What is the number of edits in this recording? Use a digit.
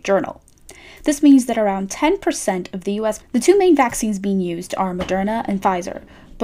1